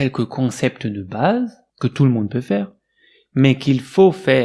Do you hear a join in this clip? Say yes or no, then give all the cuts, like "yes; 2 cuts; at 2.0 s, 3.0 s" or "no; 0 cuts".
yes; 1 cut; at 1.7 s